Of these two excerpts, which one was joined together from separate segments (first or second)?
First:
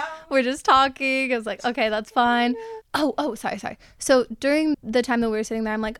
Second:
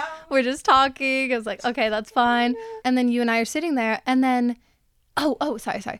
first